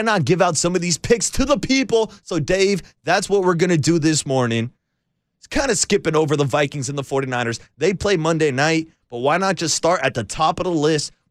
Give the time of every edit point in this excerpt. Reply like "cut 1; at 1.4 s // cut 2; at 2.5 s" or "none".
none